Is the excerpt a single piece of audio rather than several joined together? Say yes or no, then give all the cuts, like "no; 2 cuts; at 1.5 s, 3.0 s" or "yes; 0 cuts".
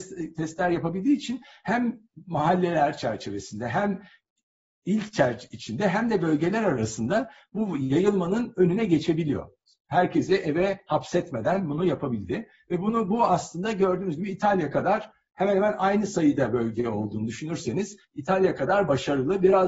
yes; 0 cuts